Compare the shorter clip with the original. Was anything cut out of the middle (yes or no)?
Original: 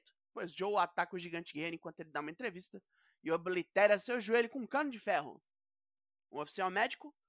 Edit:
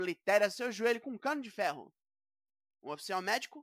no